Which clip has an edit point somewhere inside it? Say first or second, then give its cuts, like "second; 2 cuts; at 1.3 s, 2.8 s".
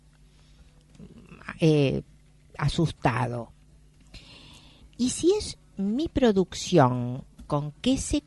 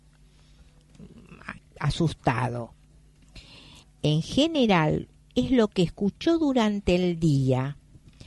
second; 2 cuts; at 1.6 s, 3.8 s